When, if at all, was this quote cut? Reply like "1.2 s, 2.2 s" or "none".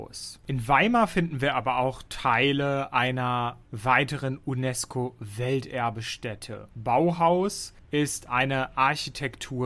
6.7 s

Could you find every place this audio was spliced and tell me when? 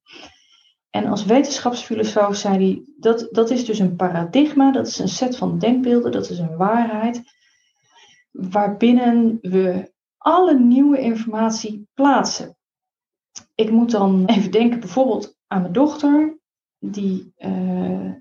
14.2 s

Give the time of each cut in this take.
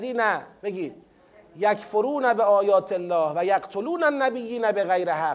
none

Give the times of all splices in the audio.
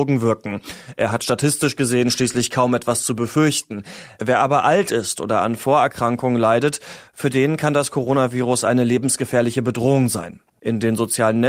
none

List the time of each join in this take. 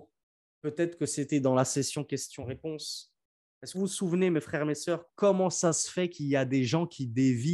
3.7 s, 5.1 s

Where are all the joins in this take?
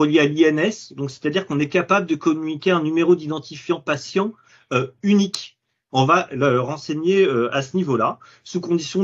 5.9 s

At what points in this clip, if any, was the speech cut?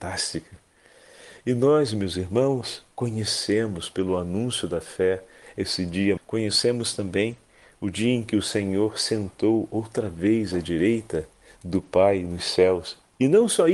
6.2 s

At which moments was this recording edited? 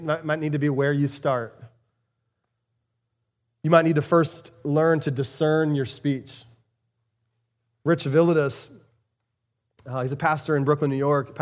none

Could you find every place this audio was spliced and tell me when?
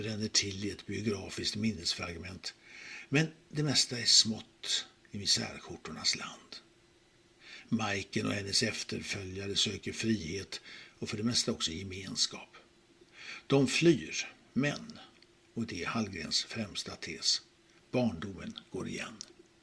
none

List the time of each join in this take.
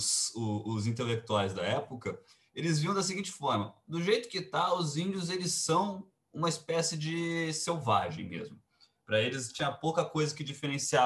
none

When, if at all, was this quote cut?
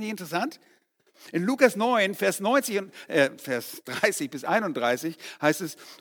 none

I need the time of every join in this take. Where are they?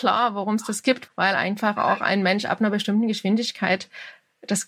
1.1 s

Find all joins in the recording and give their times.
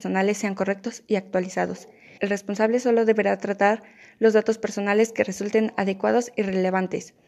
2.2 s

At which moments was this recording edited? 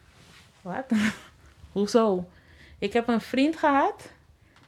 none

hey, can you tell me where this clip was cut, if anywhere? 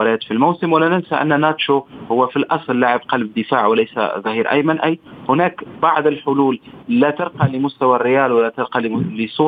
6.8 s

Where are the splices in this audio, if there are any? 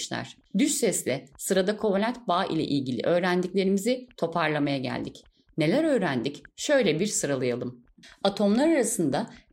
none

